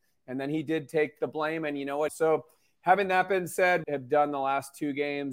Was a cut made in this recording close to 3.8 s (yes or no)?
yes